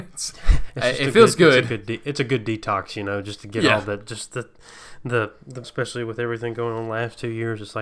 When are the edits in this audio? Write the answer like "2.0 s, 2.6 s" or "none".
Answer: 5.6 s